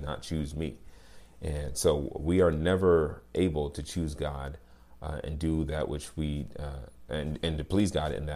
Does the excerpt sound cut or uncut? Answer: uncut